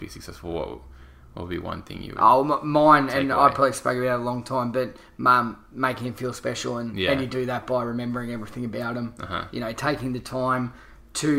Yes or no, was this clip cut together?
no